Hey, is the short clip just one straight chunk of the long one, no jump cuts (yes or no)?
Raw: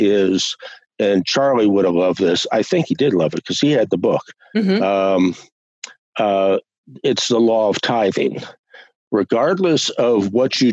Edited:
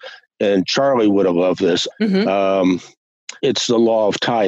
no